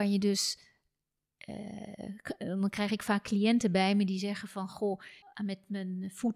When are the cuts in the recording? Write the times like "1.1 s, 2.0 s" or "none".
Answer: 5.2 s